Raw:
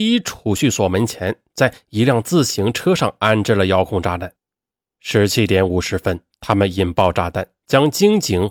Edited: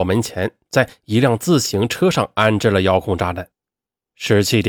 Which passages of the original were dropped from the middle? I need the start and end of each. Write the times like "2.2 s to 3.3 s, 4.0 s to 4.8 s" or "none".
none